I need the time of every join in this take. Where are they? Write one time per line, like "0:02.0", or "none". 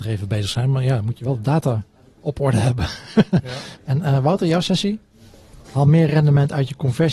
0:03.7
0:05.6